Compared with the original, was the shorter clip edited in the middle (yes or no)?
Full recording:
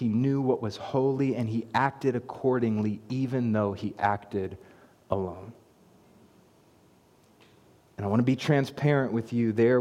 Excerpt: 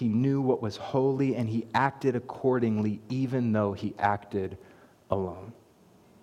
no